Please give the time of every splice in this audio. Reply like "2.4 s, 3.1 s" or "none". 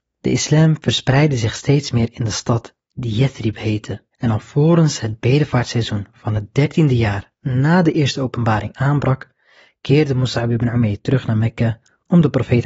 4.1 s